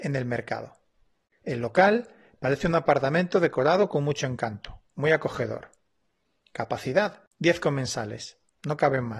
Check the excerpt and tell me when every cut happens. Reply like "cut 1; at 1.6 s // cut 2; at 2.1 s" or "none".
none